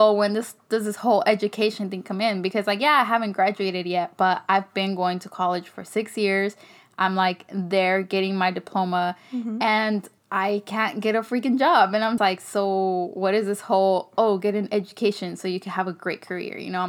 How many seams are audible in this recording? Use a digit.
2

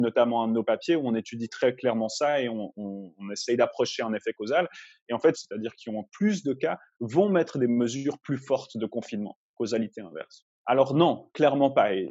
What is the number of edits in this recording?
2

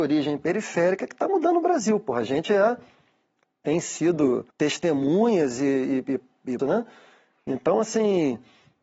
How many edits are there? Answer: 2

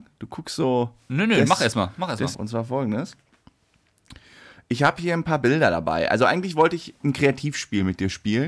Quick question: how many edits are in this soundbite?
1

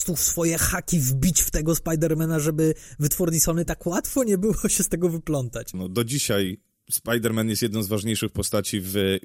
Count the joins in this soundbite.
1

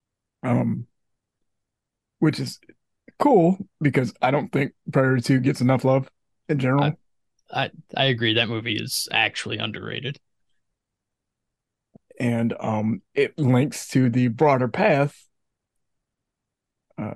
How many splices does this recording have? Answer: 0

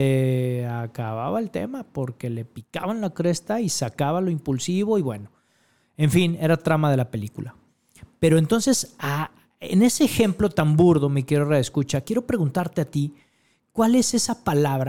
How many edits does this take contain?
0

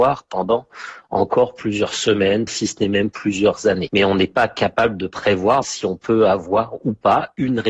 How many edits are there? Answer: 2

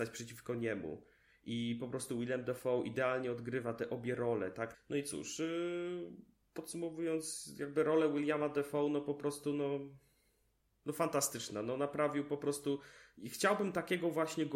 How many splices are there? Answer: 1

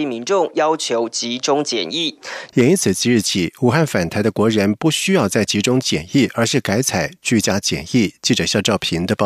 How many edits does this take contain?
1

